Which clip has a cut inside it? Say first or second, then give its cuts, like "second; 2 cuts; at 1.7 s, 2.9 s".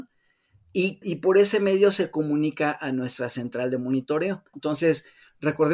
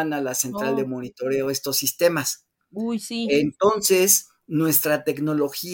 first; 2 cuts; at 1.0 s, 4.5 s